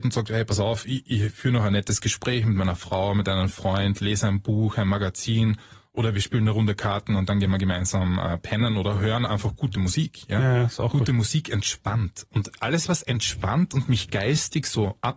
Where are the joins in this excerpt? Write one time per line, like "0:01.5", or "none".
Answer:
none